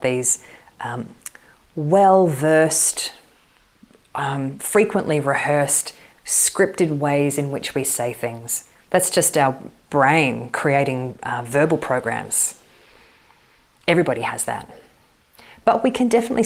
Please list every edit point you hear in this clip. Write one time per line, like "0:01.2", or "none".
none